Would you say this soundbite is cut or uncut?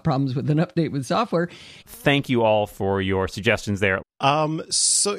cut